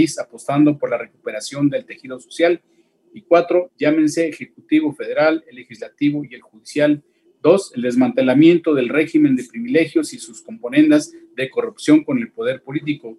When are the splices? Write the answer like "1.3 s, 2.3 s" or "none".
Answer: 3.7 s, 7.2 s